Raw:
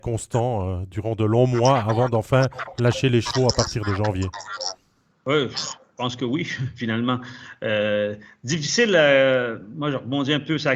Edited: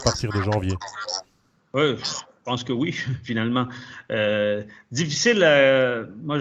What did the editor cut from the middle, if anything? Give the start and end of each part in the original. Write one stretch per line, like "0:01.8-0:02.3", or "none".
none